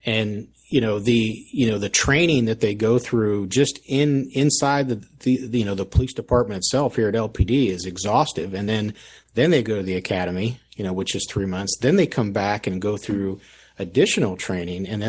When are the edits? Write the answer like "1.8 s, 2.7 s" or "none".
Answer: none